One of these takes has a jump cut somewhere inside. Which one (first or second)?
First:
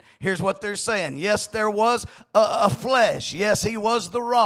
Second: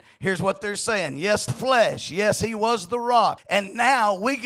second